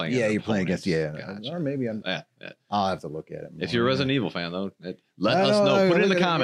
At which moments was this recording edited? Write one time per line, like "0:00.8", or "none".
0:02.0